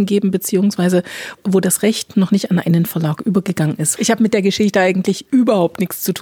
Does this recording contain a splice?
yes; 1 cut; at 4.0 s

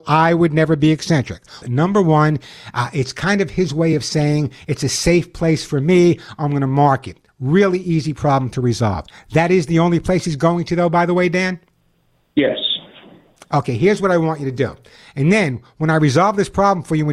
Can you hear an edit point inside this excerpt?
yes; 1 cut; at 1.6 s

